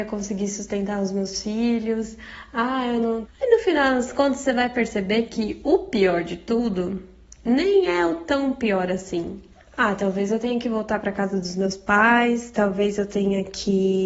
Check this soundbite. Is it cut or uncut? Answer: cut